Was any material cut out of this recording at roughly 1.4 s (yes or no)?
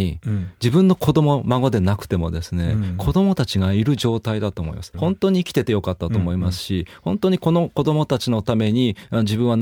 no